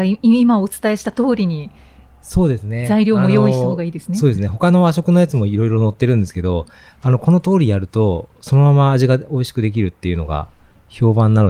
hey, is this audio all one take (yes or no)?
yes